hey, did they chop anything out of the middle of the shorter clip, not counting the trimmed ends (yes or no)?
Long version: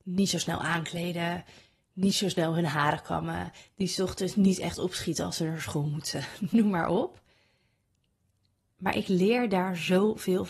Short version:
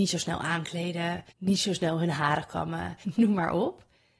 yes